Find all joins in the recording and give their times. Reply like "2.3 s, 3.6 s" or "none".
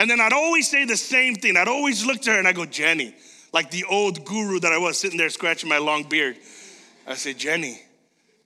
none